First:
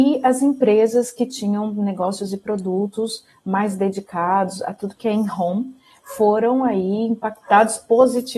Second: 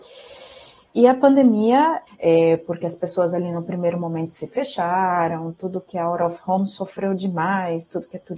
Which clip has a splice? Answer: second; 1 cut; at 2.1 s

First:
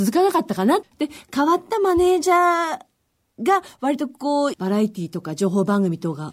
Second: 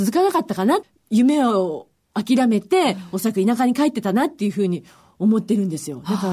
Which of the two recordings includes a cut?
first; 2 cuts; at 0.9 s, 4.5 s

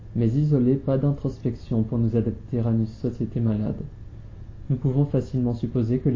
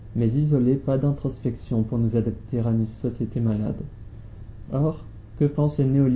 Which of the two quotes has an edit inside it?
second; 1 cut; at 4.7 s

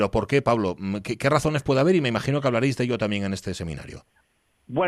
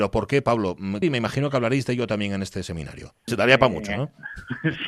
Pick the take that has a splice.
second; 2 cuts; at 1.0 s, 3.3 s

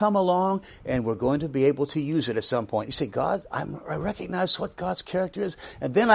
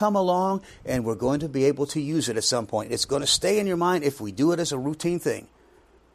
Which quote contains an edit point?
first; 1 cut; at 2.9 s

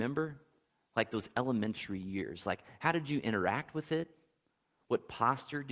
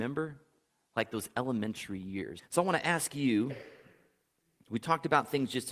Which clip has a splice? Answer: second; 1 cut; at 2.4 s

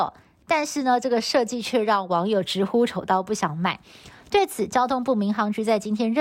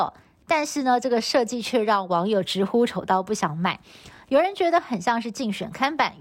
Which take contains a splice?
first; 1 cut; at 4.2 s

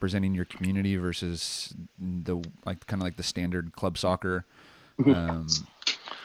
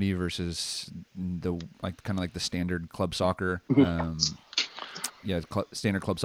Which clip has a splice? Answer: second; 2 cuts; at 3.7 s, 5.1 s

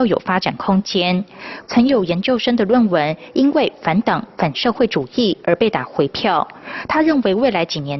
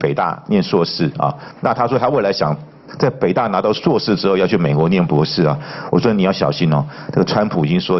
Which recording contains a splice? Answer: first; 1 cut; at 1.6 s

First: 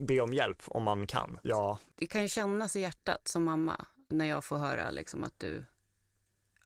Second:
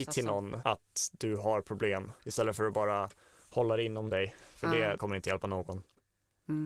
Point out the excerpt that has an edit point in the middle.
first; 1 cut; at 1.4 s

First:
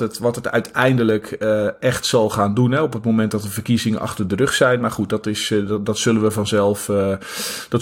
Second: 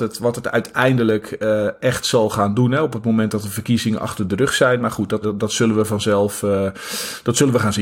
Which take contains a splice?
second; 1 cut; at 5.2 s

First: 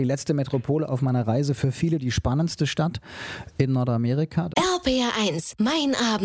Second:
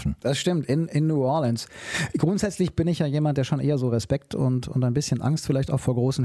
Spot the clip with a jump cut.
first; 1 cut; at 4.5 s

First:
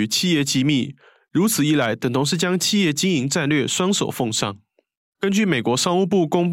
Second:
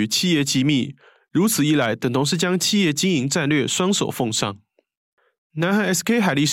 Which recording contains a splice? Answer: first; 1 cut; at 5.1 s

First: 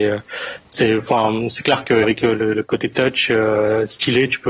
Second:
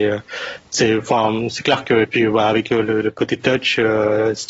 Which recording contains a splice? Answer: first; 1 cut; at 2.0 s

